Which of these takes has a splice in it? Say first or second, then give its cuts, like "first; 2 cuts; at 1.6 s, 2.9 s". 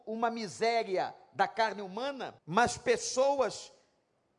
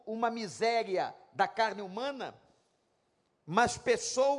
first; 1 cut; at 2.4 s